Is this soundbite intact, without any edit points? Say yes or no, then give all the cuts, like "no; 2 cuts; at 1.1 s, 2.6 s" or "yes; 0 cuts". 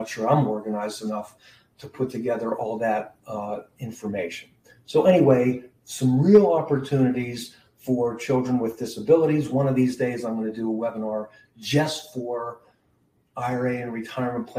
yes; 0 cuts